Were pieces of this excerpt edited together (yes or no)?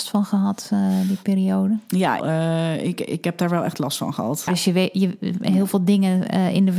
yes